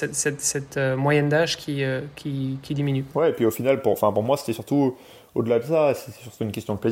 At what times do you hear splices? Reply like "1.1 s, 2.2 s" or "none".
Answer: none